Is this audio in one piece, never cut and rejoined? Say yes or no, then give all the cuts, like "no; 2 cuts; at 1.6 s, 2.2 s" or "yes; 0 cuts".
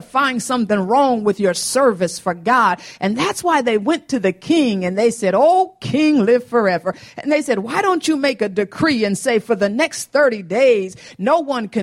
yes; 0 cuts